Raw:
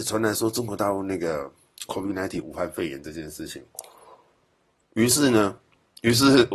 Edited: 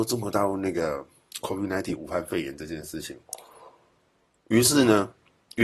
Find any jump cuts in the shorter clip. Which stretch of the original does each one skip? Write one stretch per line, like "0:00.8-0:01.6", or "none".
none